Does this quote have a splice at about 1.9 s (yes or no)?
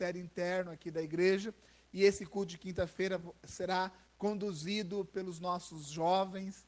no